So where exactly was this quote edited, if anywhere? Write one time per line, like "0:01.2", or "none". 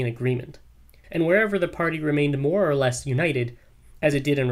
0:01.0